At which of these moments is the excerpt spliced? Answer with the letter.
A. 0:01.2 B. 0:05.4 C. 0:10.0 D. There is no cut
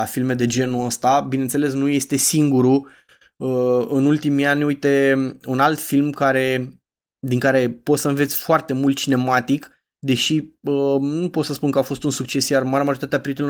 D